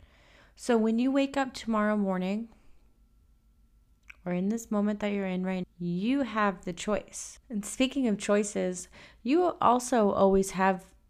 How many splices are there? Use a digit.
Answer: 1